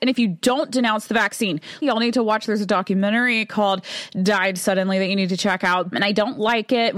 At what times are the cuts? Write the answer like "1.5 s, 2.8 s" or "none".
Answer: 1.8 s, 5.9 s